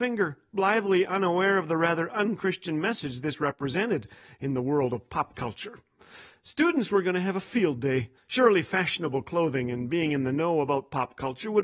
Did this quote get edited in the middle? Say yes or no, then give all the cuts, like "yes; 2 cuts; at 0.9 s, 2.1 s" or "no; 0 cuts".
yes; 1 cut; at 8.2 s